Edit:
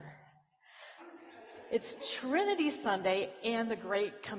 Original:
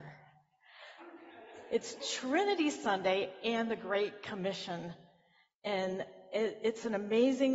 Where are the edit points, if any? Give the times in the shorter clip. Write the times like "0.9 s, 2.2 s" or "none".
none